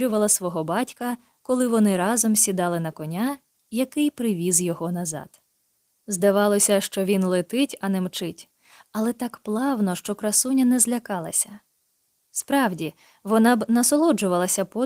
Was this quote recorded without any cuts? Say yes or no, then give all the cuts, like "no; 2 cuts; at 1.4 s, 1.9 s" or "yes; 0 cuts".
yes; 0 cuts